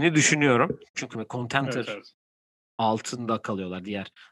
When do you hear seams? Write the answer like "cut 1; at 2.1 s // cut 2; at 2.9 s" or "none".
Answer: cut 1; at 0.9 s